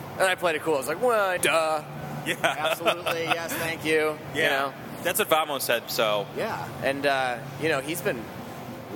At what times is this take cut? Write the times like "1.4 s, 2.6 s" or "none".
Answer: 1.4 s, 5.8 s

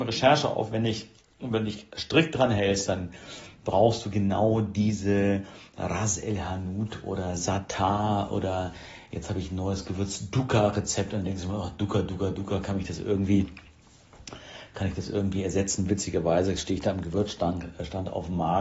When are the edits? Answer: none

